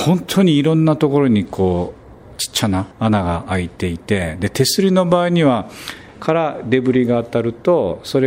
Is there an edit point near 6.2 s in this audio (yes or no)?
yes